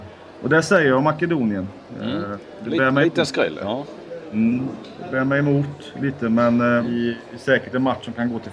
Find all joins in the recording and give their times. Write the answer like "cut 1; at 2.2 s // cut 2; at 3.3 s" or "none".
cut 1; at 6.8 s